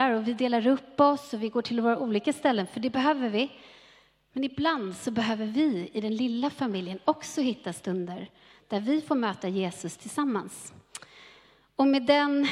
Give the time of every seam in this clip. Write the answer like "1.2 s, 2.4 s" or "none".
none